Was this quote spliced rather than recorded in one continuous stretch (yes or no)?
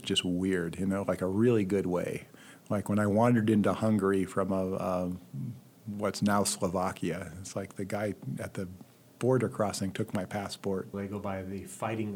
yes